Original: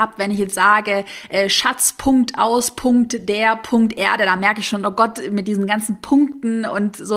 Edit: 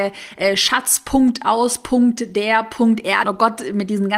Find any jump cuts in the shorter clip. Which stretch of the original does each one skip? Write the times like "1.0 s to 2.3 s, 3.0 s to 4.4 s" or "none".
4.2 s to 4.8 s